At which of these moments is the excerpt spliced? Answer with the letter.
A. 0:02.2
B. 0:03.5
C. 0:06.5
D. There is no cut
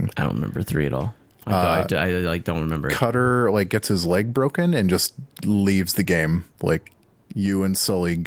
C